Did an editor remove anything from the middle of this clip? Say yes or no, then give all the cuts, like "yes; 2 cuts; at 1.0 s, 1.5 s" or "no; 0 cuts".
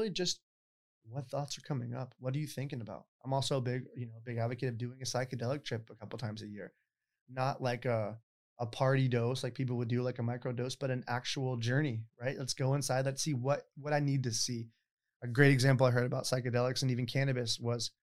no; 0 cuts